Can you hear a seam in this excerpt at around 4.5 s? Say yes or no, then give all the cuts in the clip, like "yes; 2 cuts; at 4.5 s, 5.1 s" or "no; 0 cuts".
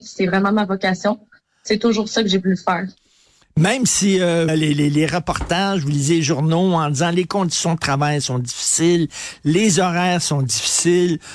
yes; 1 cut; at 4.5 s